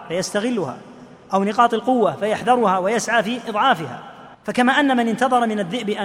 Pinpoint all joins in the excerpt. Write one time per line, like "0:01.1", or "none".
0:04.3